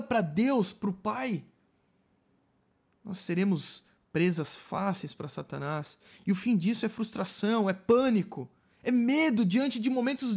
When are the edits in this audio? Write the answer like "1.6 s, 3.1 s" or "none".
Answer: none